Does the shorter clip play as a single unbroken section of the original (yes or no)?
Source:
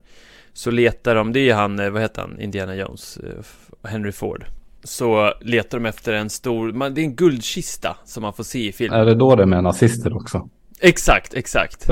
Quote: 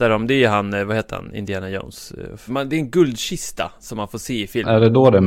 no